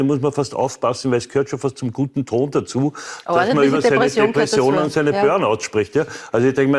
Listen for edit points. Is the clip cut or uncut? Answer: uncut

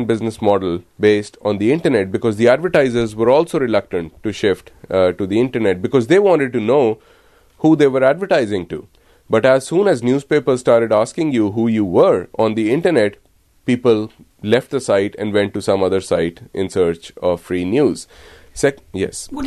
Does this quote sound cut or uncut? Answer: uncut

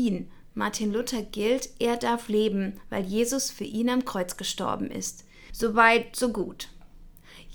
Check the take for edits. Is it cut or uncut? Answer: cut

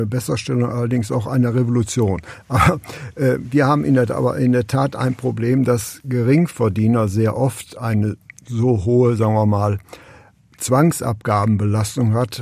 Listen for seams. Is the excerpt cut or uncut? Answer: uncut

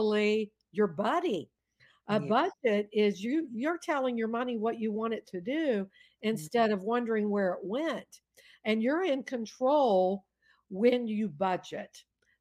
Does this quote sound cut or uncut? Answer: uncut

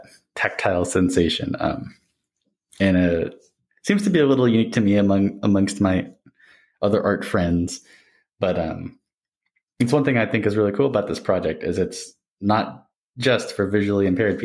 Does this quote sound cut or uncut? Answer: uncut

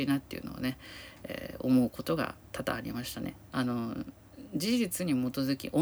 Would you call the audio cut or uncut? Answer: cut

